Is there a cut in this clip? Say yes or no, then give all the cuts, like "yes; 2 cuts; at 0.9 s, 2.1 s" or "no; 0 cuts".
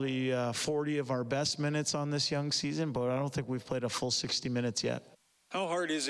no; 0 cuts